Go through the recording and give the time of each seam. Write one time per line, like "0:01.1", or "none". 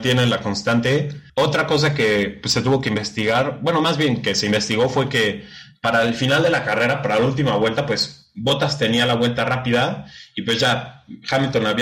0:01.3

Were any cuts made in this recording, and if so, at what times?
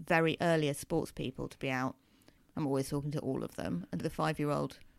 0:02.4
0:04.0

